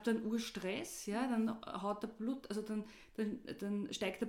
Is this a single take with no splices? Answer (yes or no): yes